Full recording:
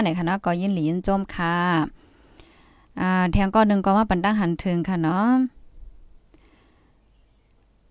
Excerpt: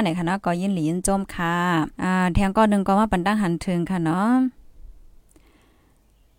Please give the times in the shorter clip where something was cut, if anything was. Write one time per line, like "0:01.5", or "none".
0:01.9